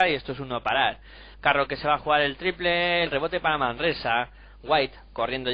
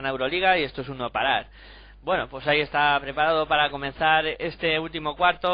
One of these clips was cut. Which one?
first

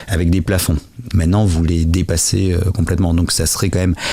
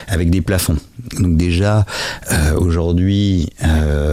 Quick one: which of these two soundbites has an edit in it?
first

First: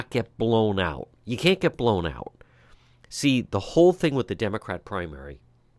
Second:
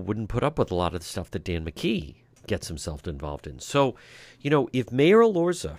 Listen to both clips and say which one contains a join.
first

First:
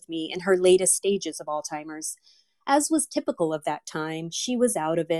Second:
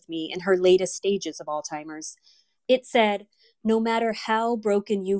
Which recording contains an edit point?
second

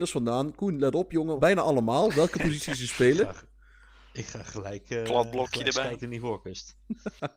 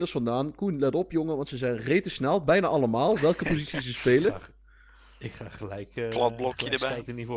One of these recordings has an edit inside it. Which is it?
first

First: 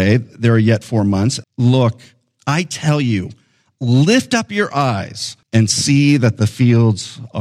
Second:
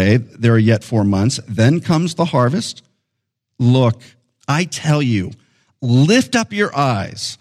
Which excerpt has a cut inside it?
first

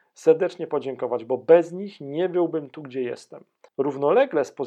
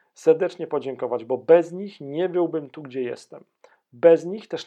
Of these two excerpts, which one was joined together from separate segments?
first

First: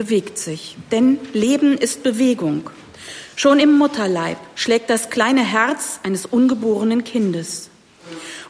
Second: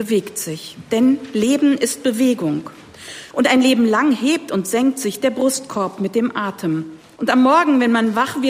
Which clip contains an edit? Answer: second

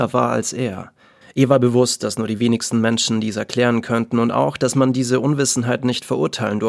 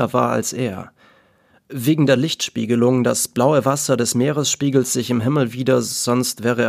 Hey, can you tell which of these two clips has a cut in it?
first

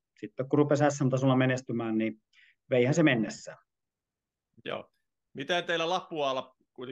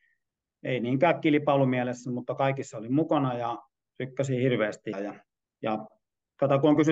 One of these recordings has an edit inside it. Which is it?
second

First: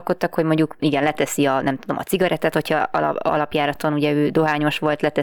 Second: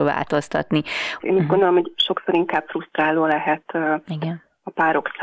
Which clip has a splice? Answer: second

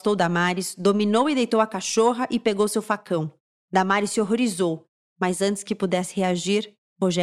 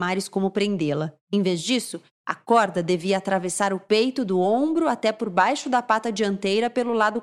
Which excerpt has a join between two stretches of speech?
second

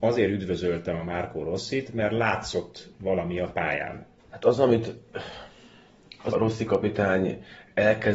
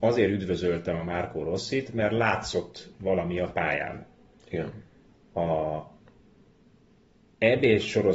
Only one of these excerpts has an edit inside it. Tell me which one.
first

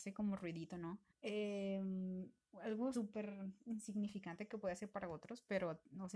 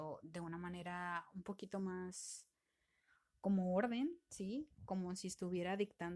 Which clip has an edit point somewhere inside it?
first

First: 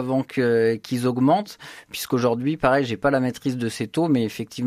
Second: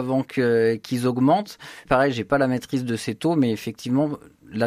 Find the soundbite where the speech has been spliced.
second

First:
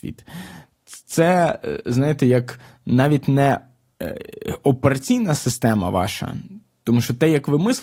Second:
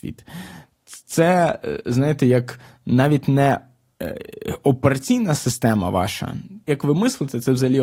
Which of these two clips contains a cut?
second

